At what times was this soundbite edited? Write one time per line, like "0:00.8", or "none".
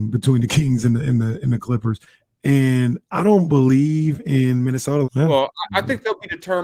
0:02.2
0:05.0